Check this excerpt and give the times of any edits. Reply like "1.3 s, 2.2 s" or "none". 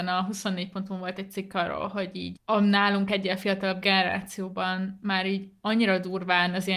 2.4 s